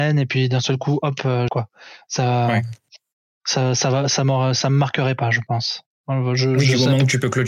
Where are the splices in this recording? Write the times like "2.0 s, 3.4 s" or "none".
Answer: 1.5 s